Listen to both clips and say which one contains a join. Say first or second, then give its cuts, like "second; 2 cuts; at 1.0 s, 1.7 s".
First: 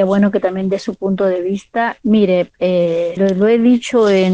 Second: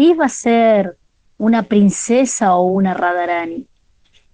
first; 1 cut; at 3.2 s